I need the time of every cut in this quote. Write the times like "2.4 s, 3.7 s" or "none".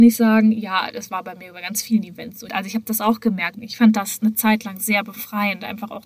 2.5 s, 3.5 s